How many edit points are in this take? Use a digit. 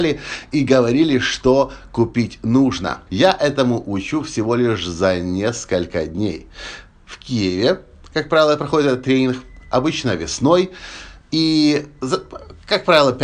1